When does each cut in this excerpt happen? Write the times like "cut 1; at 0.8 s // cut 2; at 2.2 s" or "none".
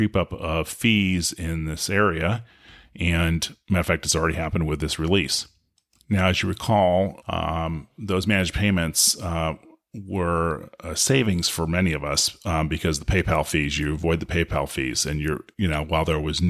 cut 1; at 7.2 s